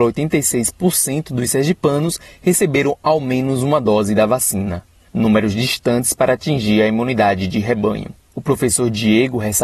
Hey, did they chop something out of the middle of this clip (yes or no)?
no